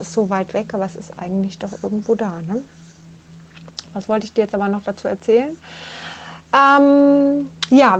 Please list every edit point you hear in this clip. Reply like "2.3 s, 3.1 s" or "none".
none